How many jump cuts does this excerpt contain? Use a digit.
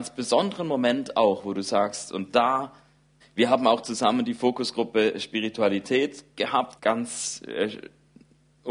2